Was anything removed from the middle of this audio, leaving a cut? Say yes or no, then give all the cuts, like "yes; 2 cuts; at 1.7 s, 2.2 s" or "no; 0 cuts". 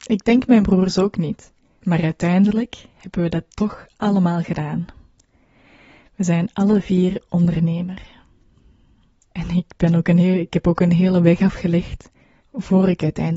no; 0 cuts